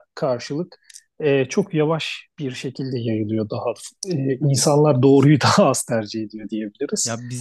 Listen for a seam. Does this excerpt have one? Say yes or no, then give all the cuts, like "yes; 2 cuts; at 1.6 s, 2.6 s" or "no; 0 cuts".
no; 0 cuts